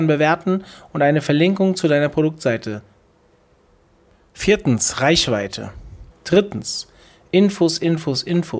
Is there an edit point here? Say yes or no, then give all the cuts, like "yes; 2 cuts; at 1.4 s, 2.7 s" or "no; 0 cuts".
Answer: yes; 1 cut; at 6.1 s